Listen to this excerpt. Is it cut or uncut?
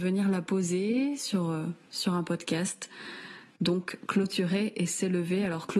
uncut